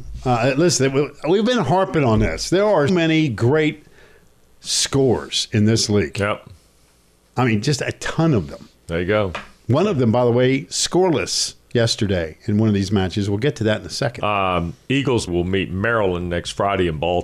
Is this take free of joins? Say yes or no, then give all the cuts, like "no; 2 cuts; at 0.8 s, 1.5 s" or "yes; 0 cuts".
no; 2 cuts; at 2.9 s, 15.3 s